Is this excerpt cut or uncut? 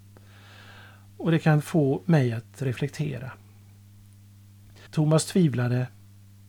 cut